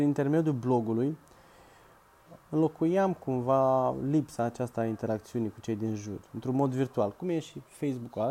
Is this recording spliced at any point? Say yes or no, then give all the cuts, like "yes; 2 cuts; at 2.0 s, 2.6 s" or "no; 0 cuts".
yes; 1 cut; at 2.4 s